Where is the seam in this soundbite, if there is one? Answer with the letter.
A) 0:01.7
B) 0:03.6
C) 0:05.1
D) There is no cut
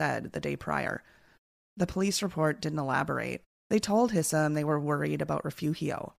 B